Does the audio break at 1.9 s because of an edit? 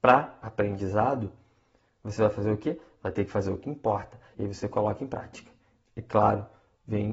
no; 1 cut; at 4.3 s

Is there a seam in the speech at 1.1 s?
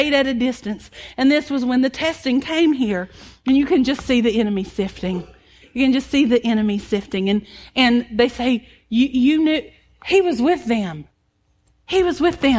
no; 0 cuts

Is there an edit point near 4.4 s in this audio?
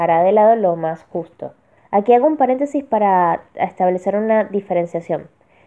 no; 1 cut; at 1.8 s

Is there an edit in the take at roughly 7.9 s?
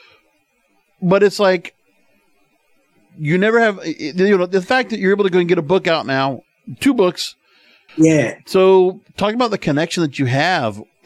yes; 1 cut; at 7.9 s

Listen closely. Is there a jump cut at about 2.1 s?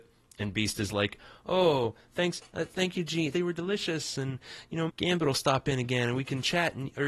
no; 2 cuts; at 3.3 s, 4.9 s

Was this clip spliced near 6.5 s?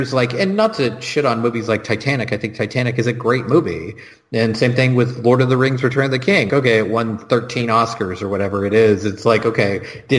yes; 1 cut; at 6.5 s

